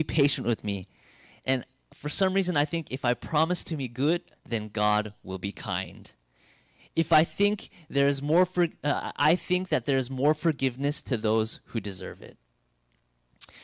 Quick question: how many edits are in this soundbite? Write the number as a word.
one